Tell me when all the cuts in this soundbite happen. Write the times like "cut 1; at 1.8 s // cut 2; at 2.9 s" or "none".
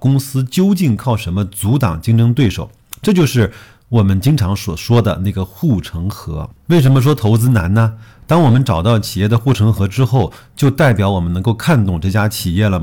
cut 1; at 6.5 s